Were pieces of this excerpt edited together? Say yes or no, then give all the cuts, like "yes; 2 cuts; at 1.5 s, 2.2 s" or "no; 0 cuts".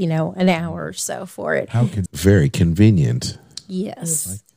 yes; 1 cut; at 2.1 s